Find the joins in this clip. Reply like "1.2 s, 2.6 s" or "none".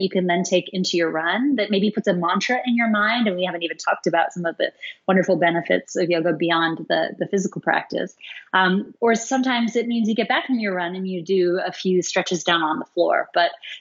none